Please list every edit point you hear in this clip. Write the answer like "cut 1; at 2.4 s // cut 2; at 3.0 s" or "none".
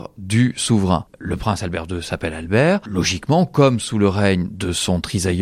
none

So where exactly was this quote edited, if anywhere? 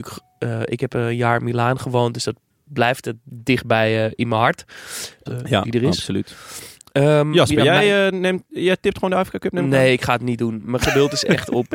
cut 1; at 5.3 s

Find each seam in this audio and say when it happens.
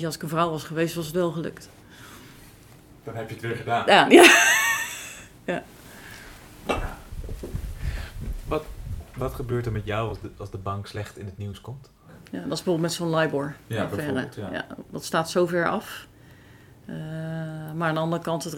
cut 1; at 12.0 s

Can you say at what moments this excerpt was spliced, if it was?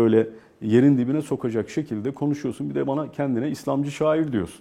none

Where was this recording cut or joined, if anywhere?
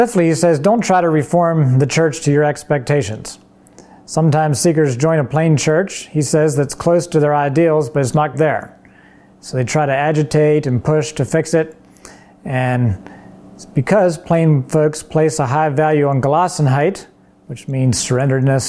cut 1; at 8.3 s

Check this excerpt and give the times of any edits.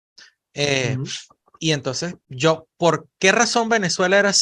cut 1; at 2.2 s

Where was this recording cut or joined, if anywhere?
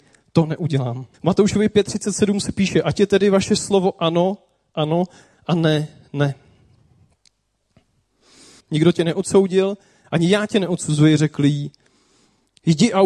cut 1; at 1.1 s // cut 2; at 8.6 s // cut 3; at 10.0 s

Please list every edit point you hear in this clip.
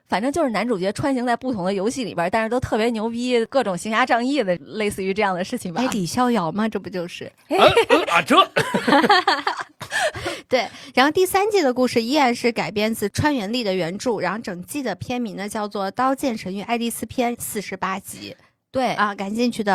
cut 1; at 17.3 s

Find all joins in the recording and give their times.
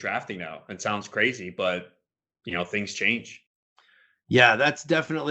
none

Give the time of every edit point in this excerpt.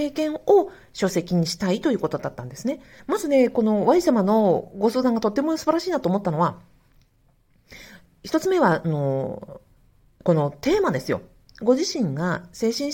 cut 1; at 3.0 s

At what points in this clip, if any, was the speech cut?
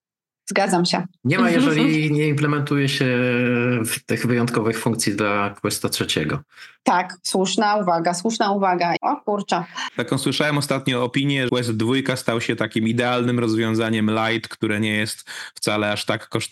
cut 1; at 6.8 s // cut 2; at 9.0 s // cut 3; at 11.5 s

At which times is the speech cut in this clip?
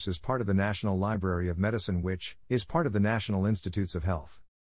cut 1; at 2.4 s

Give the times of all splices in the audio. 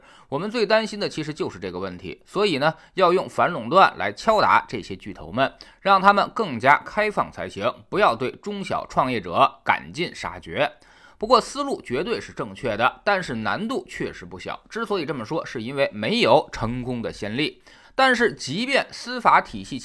cut 1; at 17.8 s

